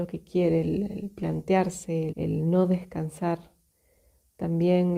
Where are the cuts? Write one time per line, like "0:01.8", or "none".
0:02.1